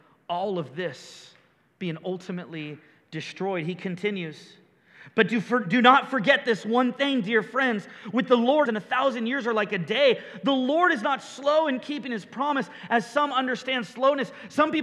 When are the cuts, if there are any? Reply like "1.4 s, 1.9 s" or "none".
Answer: 8.7 s